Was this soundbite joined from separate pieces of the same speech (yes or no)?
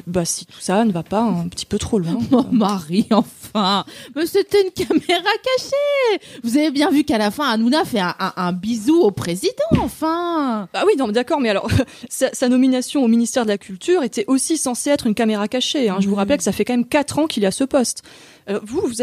no